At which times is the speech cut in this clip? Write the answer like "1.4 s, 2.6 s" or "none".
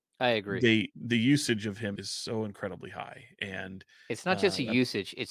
2.0 s